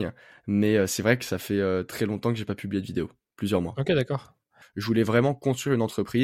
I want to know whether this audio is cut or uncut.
cut